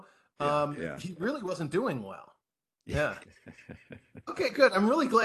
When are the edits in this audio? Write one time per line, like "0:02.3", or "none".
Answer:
none